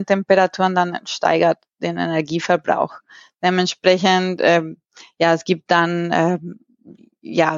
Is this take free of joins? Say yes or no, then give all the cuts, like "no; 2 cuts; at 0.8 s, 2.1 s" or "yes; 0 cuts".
yes; 0 cuts